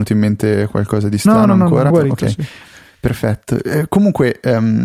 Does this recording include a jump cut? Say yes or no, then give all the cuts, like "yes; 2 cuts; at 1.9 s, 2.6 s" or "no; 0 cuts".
yes; 1 cut; at 1.9 s